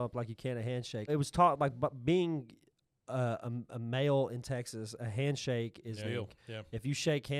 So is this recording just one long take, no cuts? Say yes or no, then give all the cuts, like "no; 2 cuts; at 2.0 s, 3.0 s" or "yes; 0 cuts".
no; 2 cuts; at 1.1 s, 6.0 s